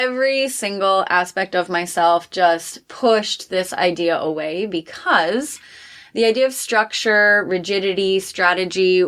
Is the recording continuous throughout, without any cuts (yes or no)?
yes